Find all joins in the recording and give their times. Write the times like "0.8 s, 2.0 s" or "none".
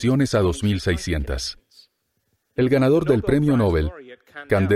2.6 s